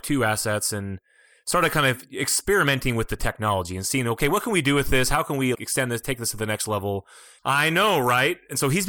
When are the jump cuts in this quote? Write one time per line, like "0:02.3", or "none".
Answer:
0:05.5
0:07.4